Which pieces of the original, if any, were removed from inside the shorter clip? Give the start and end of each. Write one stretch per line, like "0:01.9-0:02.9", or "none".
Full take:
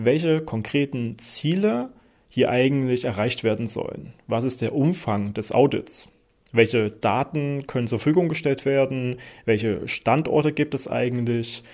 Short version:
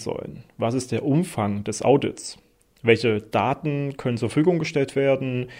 none